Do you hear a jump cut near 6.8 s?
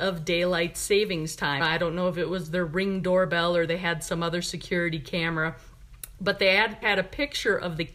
yes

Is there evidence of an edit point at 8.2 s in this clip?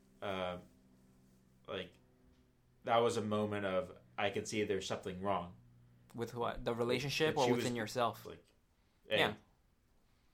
yes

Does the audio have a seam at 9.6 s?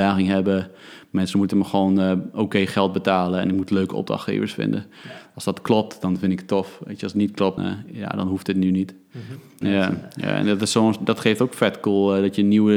yes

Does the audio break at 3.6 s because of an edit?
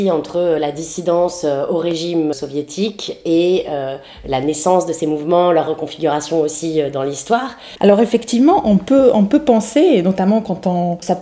no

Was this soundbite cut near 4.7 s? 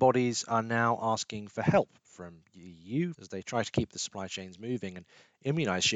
no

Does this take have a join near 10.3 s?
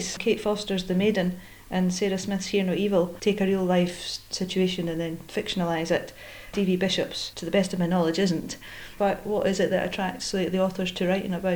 no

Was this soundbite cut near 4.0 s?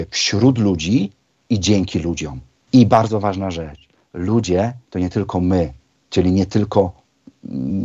no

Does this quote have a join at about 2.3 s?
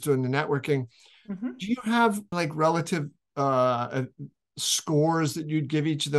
yes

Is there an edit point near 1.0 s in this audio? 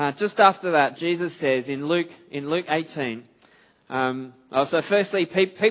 yes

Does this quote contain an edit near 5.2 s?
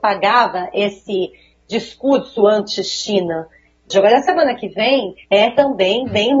yes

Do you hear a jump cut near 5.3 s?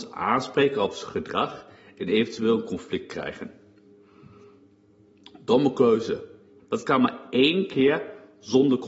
no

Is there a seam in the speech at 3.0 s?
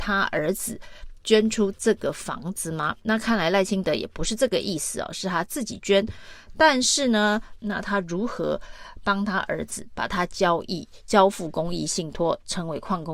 no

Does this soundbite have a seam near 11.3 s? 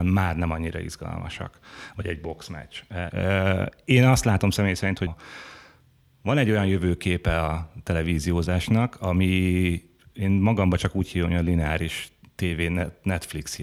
no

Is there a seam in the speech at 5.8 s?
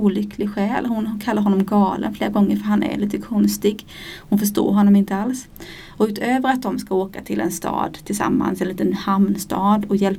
no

